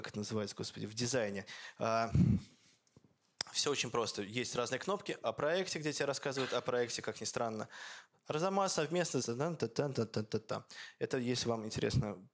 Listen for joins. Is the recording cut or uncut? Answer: uncut